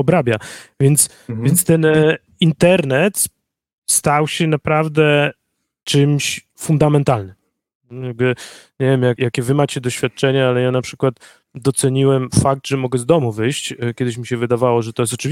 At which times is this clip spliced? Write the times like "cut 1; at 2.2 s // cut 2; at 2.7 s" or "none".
cut 1; at 9.2 s